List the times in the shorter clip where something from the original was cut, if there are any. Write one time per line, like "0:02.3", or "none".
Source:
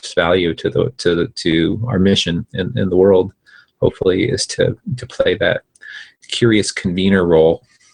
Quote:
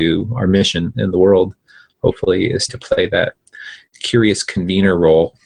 0:00.9
0:02.7

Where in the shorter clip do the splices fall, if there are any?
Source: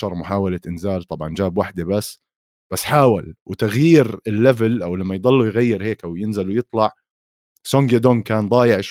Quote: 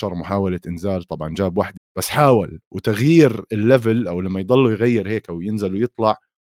0:01.8

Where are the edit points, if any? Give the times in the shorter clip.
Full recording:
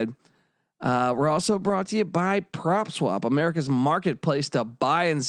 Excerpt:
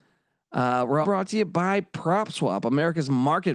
0:01.0

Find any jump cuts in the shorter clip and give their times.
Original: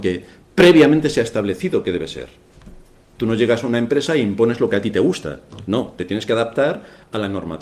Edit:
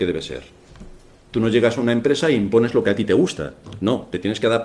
none

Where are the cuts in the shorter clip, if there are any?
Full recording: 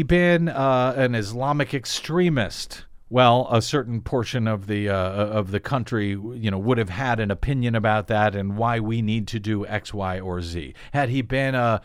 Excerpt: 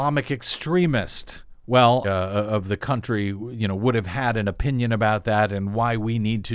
0:02.0

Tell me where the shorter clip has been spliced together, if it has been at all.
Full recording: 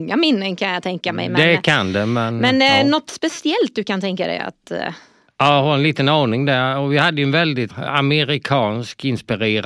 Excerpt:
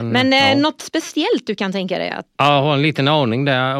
0:02.4

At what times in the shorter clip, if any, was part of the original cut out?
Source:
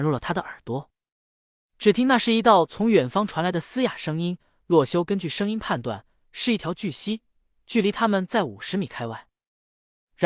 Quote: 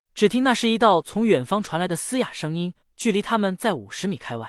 0:02.8

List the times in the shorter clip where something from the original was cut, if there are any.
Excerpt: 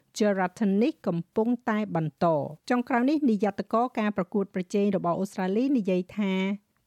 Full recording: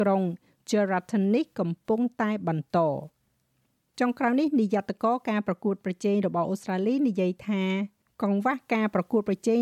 0:02.6

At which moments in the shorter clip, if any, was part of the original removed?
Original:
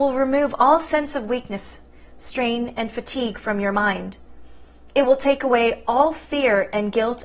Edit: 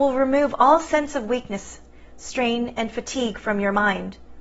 none

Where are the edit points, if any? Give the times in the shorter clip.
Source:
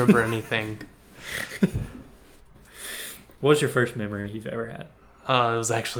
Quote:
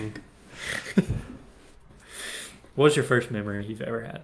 none

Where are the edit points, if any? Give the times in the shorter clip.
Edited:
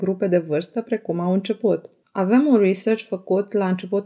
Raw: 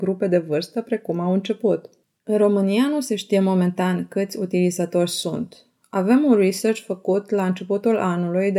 0:02.0

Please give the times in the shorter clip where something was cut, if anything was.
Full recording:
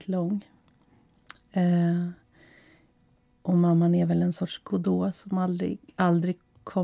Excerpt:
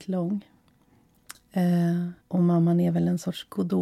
0:02.2

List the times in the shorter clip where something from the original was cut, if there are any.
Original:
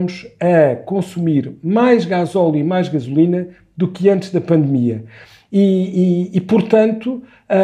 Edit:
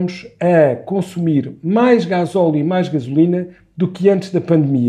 none

